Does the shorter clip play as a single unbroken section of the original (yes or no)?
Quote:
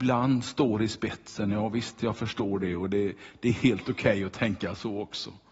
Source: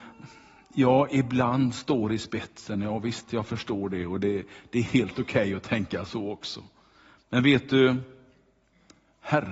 yes